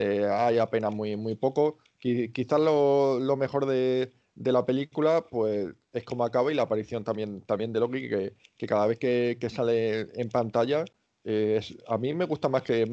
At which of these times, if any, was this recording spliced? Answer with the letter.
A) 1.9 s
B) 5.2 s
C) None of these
C